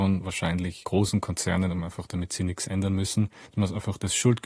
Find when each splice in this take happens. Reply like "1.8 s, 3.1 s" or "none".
3.5 s